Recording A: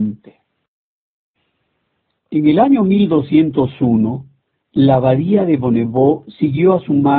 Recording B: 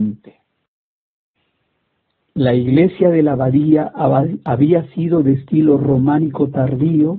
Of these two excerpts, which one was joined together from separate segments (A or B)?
A